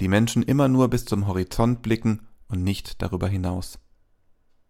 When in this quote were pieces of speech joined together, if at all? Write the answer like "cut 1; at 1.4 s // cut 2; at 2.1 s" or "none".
none